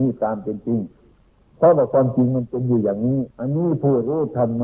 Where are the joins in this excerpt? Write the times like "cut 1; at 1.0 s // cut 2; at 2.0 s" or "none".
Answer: cut 1; at 3.3 s